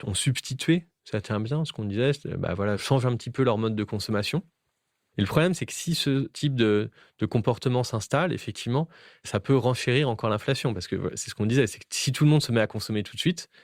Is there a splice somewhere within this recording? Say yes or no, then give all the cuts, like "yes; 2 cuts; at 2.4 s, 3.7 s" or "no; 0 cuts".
no; 0 cuts